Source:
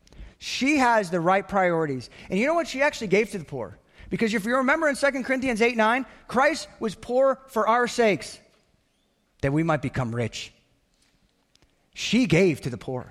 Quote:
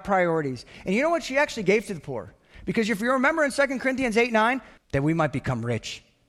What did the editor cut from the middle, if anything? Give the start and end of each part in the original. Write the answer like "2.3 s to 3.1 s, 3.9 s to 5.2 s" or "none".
6.2 s to 9.3 s